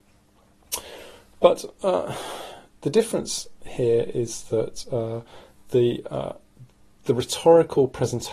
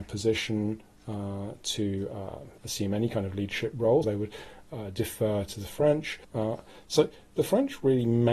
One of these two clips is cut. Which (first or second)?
second